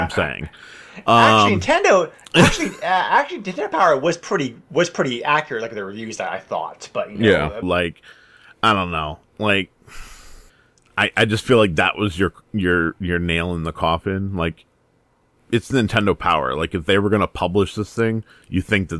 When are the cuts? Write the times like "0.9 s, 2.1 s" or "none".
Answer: 7.6 s

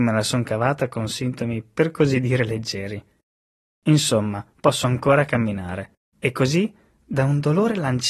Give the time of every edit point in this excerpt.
6.1 s

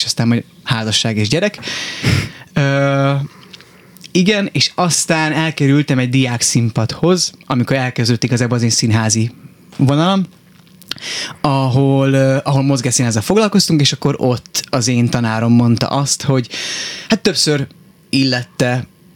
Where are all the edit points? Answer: none

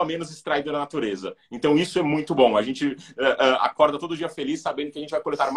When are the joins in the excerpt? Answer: none

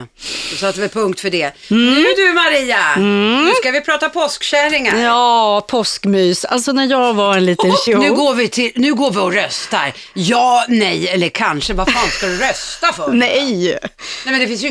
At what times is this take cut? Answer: 7.9 s

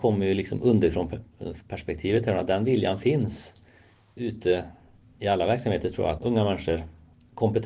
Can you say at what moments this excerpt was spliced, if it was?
6.2 s

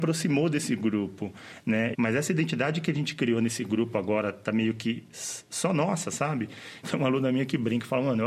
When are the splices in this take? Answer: 1.9 s, 6.8 s

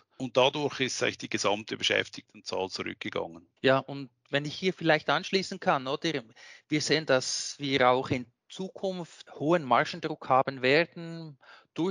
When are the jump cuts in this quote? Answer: 3.6 s

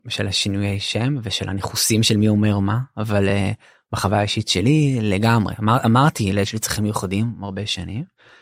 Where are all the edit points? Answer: none

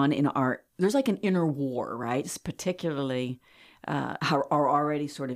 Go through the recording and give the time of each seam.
4.2 s

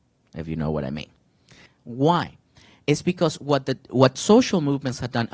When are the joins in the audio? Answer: 1.7 s

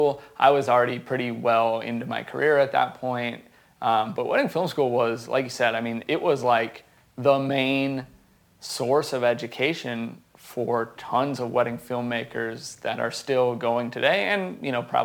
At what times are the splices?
none

